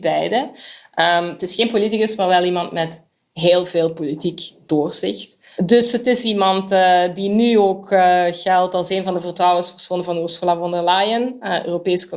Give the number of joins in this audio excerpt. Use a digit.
1